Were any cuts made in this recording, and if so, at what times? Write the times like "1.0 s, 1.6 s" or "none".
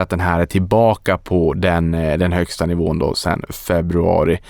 none